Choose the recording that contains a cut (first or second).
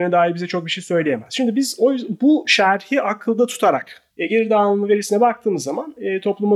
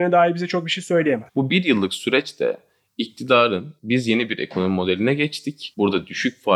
second